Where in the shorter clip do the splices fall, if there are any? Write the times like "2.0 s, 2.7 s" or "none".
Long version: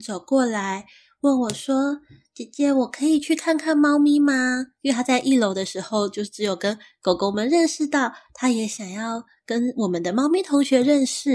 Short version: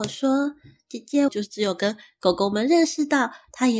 1.3 s